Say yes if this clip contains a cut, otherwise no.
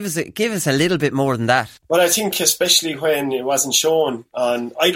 yes